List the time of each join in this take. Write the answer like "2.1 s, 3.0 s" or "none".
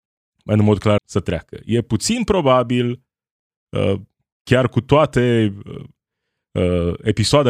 1.0 s